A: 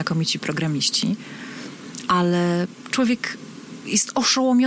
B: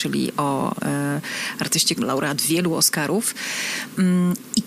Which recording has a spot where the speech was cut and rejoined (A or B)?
B